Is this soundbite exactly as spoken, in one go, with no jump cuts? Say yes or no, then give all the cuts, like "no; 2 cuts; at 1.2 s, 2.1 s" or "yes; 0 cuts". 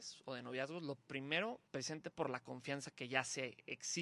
no; 1 cut; at 1.7 s